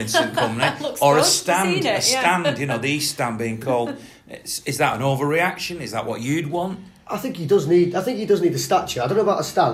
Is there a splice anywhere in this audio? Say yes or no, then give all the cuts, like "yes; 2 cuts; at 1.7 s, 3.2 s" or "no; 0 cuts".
no; 0 cuts